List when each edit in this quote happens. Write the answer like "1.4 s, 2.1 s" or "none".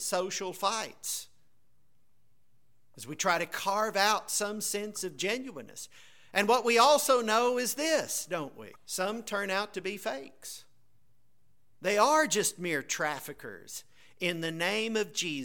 8.8 s